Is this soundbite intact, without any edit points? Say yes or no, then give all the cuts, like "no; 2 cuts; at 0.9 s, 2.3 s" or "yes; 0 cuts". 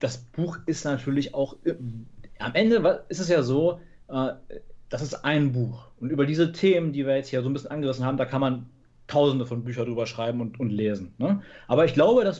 yes; 0 cuts